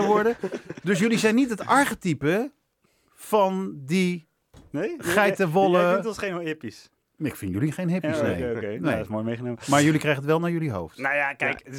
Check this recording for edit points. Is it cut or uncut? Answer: uncut